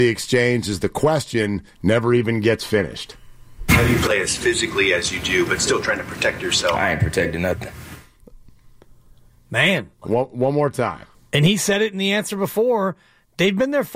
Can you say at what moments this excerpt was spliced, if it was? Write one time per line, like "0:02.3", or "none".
0:10.0
0:11.1